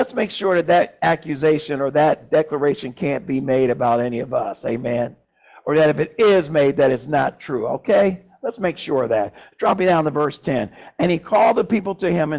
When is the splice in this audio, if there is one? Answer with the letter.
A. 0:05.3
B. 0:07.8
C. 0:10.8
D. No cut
D